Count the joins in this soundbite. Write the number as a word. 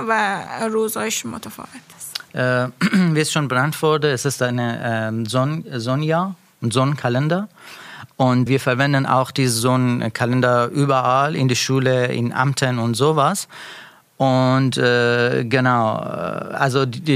one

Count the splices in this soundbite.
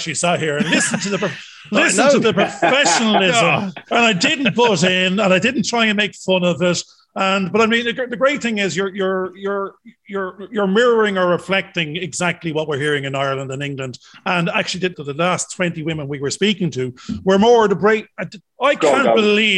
two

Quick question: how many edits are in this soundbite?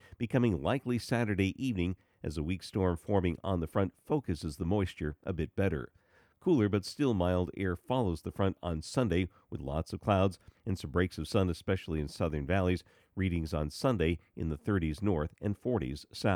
one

